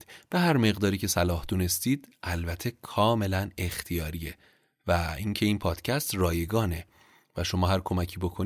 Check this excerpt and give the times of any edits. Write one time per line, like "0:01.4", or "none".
none